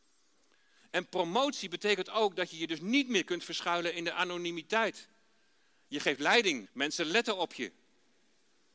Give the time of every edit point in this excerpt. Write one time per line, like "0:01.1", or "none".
0:06.7